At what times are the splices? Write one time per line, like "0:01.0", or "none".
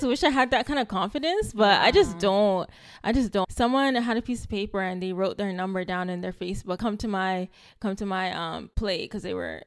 0:03.4
0:06.8